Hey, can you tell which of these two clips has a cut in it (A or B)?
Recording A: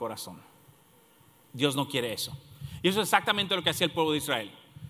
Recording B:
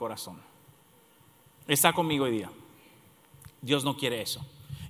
A